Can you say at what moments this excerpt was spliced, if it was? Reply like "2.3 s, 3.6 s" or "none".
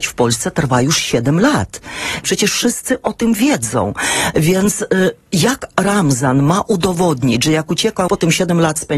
2.2 s, 8.1 s